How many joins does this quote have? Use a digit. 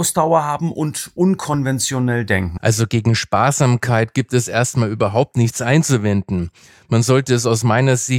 1